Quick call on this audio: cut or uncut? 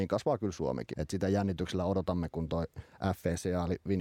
cut